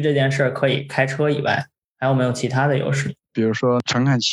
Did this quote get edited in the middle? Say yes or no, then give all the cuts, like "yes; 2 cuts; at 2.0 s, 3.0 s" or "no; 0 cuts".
no; 0 cuts